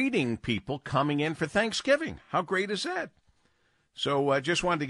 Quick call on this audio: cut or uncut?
uncut